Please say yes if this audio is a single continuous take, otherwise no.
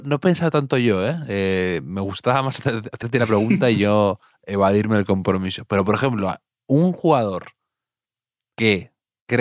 no